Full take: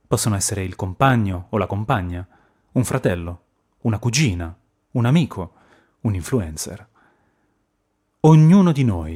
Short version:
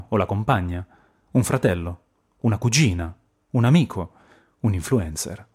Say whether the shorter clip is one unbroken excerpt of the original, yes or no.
yes